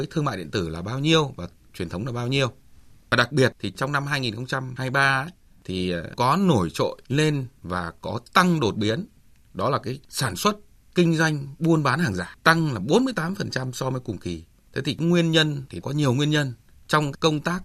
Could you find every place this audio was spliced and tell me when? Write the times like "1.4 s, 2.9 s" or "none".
16.7 s